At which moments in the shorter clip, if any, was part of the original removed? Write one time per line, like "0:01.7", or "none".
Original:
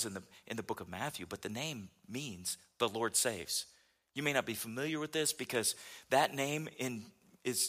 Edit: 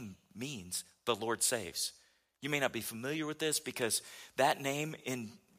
none